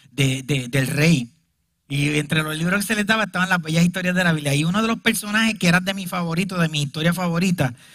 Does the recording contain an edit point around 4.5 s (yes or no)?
no